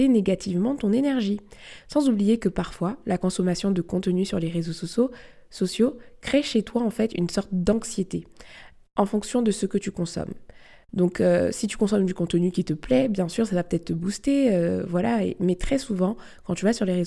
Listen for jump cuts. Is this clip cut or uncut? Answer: uncut